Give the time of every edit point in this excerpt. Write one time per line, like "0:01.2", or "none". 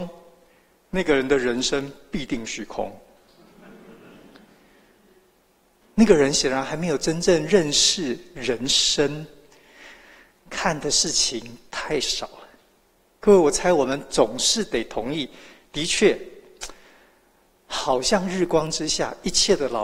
none